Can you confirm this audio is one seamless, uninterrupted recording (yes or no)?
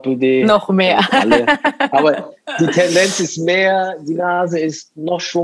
yes